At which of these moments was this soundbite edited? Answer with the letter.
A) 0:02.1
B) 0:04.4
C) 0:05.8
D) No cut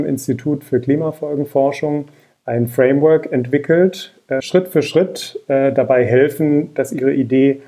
B